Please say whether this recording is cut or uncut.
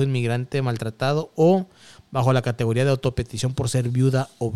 uncut